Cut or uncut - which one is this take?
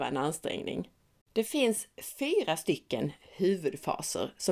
cut